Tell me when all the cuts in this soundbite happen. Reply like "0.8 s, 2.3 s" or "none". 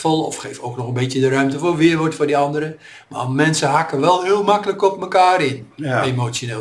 none